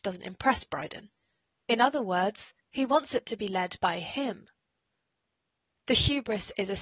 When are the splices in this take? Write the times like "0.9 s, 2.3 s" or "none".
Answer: 1.6 s